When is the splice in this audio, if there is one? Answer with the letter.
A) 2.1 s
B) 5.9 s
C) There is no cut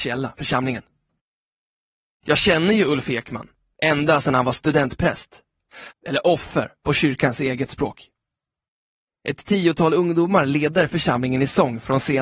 B